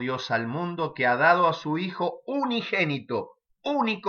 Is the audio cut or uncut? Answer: uncut